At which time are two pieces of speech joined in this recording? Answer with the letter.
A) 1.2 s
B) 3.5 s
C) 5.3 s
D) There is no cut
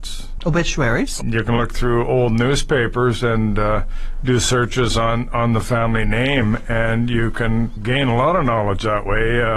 A